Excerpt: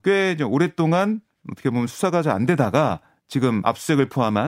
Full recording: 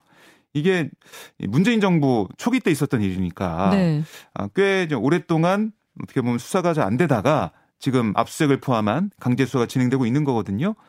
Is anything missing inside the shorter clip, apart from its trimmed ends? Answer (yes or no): no